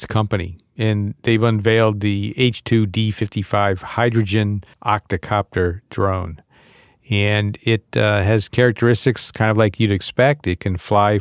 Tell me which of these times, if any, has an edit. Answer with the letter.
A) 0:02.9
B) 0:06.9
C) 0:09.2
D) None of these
D